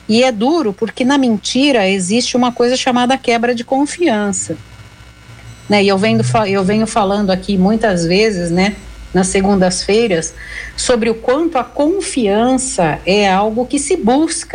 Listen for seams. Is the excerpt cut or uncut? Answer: uncut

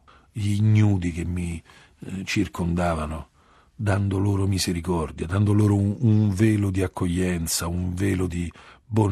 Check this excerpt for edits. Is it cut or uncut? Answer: uncut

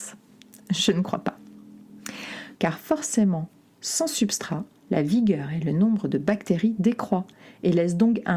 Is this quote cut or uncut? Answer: cut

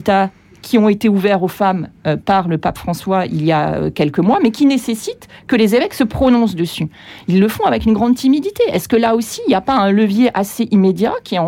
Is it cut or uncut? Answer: uncut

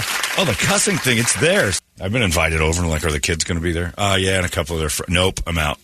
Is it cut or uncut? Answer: cut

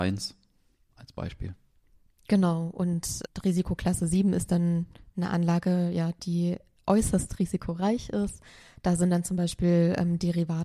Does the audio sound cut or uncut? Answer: uncut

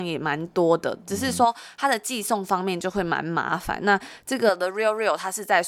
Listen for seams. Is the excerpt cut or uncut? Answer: uncut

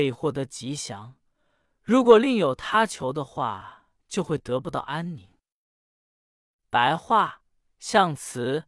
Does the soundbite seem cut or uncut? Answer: cut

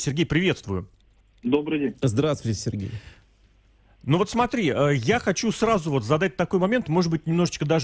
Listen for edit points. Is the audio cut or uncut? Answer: uncut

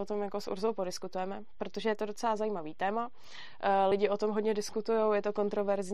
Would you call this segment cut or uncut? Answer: uncut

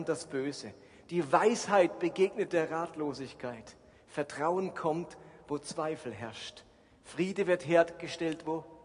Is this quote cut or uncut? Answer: uncut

